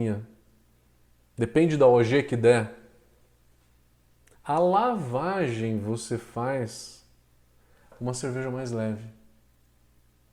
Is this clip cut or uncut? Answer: cut